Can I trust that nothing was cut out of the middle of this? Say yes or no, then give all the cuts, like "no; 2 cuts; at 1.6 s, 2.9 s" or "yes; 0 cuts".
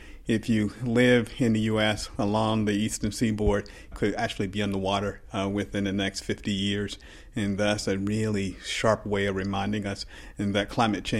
no; 1 cut; at 3.9 s